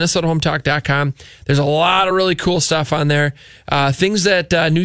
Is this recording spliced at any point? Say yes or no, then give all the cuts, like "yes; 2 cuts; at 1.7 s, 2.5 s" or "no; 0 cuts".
no; 0 cuts